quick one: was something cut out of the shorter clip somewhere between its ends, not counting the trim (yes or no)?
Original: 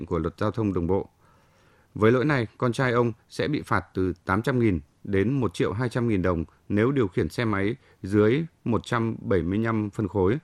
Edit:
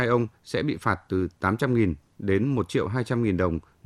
no